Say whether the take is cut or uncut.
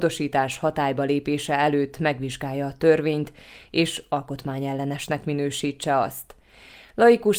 uncut